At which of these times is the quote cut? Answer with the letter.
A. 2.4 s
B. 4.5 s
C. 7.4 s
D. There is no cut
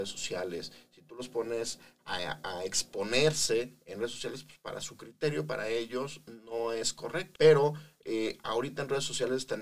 C